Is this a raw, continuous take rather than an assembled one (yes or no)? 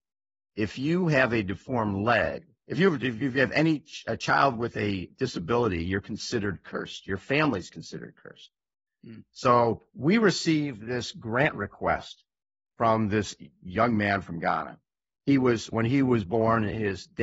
yes